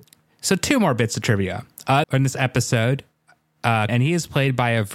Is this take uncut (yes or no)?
no